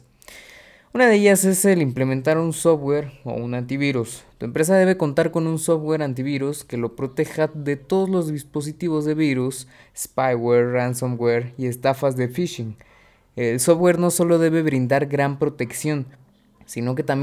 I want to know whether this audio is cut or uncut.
uncut